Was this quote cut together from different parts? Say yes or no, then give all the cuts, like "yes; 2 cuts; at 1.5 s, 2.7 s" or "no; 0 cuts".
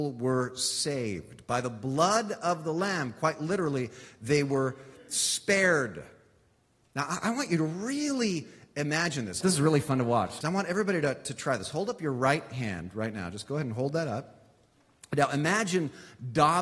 yes; 2 cuts; at 9.4 s, 10.4 s